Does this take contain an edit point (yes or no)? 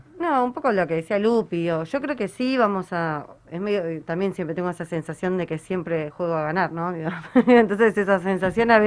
no